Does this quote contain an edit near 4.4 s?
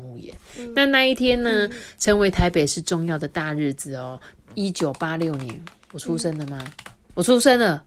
yes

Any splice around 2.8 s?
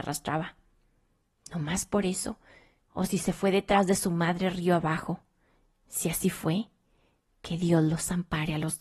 yes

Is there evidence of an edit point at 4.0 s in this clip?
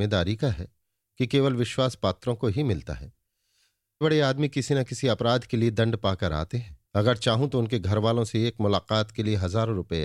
yes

